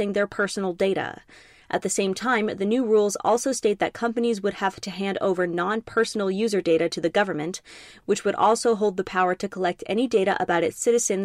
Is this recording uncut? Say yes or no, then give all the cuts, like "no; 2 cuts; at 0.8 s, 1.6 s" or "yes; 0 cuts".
yes; 0 cuts